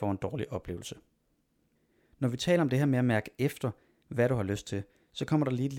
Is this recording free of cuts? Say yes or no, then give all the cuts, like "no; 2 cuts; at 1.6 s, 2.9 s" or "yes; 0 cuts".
yes; 0 cuts